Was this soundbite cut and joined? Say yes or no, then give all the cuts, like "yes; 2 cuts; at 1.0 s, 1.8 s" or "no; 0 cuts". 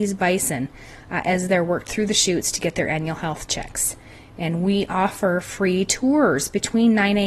no; 0 cuts